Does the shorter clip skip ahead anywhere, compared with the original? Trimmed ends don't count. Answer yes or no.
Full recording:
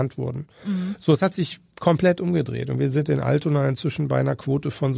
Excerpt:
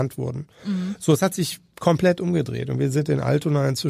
no